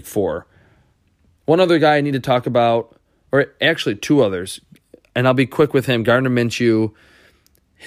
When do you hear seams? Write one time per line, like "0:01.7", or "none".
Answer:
none